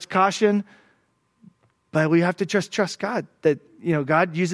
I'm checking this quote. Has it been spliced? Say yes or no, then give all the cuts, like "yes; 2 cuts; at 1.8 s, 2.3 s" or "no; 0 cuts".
no; 0 cuts